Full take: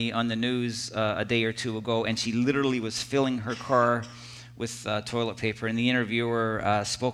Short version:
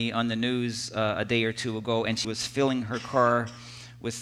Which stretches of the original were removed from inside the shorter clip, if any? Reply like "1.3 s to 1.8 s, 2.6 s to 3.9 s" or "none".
2.2 s to 2.8 s

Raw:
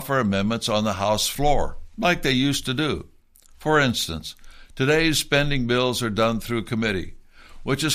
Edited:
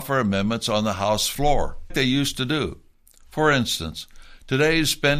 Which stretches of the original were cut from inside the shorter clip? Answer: 1.9 s to 2.2 s

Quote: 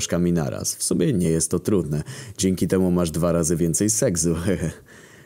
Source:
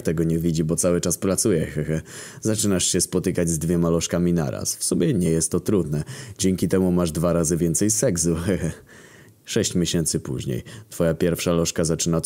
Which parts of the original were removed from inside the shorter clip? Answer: none

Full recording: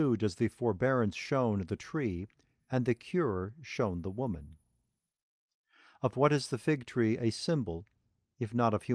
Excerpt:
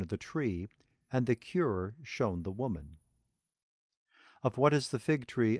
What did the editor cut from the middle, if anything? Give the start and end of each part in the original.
none

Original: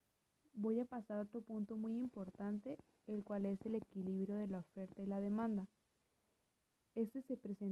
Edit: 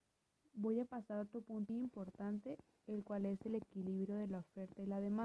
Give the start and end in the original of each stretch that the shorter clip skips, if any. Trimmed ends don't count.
1.7 s to 1.9 s

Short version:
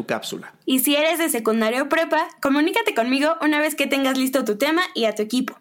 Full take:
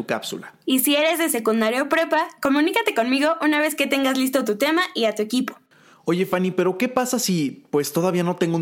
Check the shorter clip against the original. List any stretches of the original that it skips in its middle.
none

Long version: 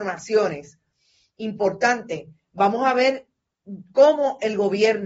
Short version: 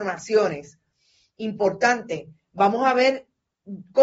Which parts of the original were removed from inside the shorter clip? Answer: none

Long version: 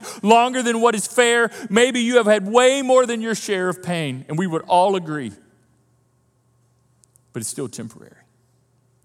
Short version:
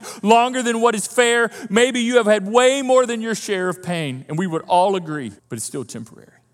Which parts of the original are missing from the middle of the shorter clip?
5.4 s to 7.2 s

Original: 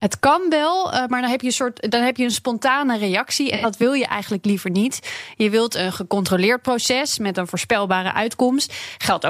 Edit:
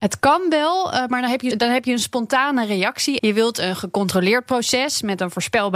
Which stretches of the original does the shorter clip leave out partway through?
1.5 s to 1.8 s, 3.5 s to 5.4 s

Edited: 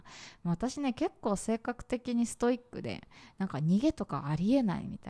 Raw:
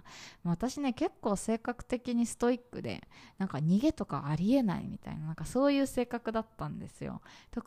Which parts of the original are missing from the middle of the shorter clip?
none

